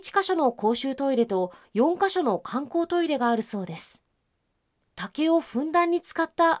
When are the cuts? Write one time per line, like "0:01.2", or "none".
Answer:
none